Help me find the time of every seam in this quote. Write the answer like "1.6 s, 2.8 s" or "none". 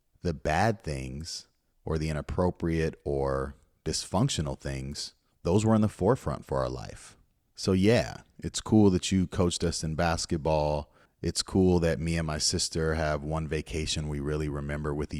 none